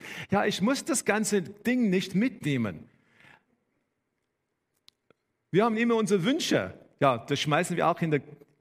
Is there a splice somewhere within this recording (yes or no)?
no